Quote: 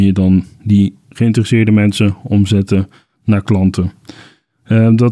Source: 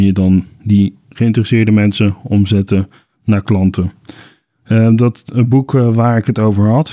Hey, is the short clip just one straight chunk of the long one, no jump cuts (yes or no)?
yes